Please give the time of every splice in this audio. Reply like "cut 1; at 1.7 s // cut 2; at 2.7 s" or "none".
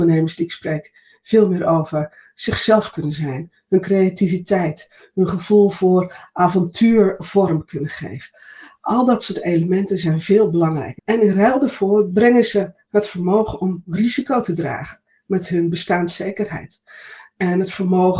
cut 1; at 11.0 s